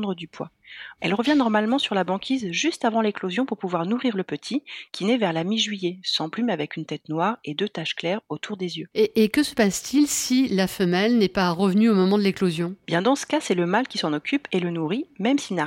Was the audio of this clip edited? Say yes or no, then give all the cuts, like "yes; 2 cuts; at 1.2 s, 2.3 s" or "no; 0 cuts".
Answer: yes; 1 cut; at 1.0 s